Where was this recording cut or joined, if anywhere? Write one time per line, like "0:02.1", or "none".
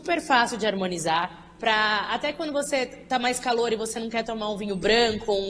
0:01.6